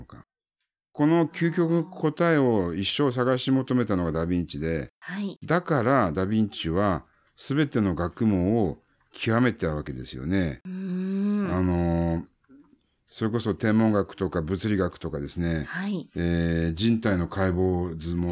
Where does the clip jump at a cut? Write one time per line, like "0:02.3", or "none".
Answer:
none